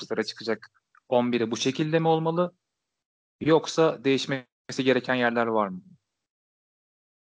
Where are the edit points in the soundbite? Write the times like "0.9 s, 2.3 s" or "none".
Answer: none